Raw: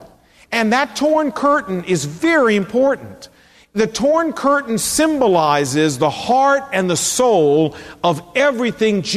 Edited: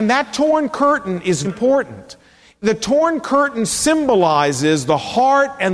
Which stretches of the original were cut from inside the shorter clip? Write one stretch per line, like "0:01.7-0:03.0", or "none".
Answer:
0:02.1-0:02.6